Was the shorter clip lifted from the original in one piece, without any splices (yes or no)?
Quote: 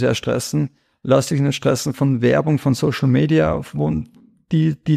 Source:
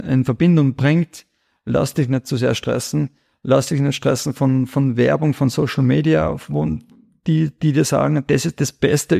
no